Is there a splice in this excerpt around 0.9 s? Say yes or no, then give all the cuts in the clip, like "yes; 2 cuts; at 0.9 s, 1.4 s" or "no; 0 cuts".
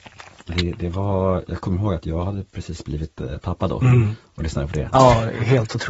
no; 1 cut; at 4.9 s